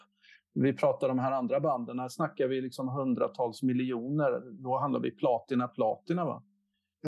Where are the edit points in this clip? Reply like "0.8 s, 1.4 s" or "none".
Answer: 5.7 s